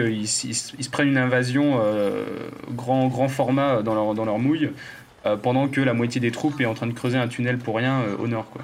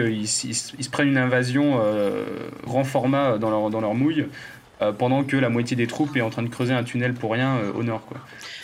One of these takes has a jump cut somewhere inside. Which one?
second; 1 cut; at 2.7 s

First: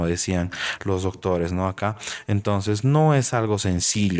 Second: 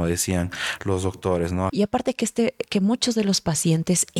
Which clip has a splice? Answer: second; 1 cut; at 1.7 s

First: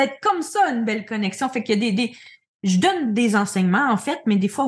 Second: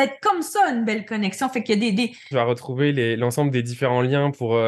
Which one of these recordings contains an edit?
second; 1 cut; at 2.3 s

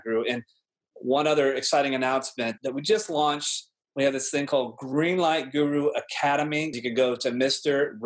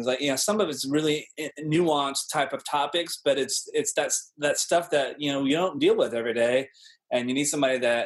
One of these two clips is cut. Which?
first; 2 cuts; at 2.6 s, 6.7 s

